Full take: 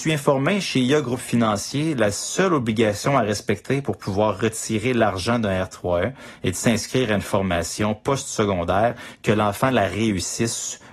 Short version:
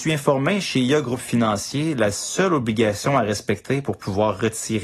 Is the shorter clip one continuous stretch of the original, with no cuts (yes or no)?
yes